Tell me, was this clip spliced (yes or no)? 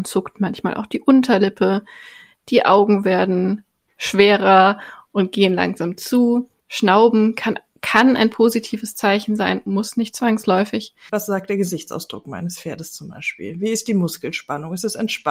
yes